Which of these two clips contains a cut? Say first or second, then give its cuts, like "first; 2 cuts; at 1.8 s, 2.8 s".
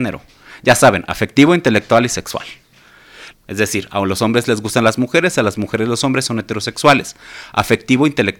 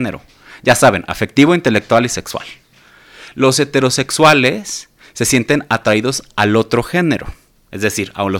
first; 1 cut; at 3.3 s